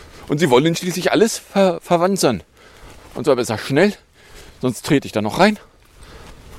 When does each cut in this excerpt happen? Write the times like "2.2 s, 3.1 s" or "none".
3.0 s